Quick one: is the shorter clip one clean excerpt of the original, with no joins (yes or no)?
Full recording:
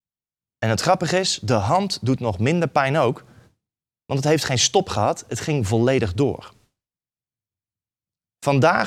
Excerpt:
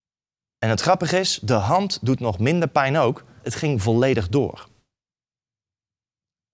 no